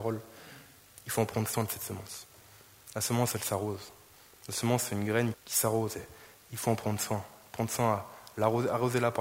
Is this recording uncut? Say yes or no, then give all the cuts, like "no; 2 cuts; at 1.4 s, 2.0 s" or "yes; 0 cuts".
no; 1 cut; at 5.3 s